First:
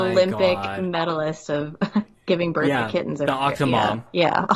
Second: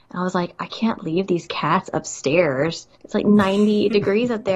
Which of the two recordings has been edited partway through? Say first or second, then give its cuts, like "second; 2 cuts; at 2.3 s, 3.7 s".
second; 1 cut; at 2.9 s